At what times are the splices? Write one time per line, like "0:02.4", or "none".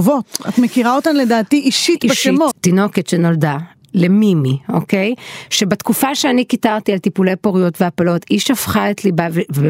0:02.5